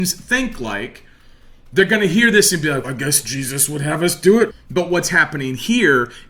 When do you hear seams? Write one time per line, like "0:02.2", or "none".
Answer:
0:02.8
0:04.5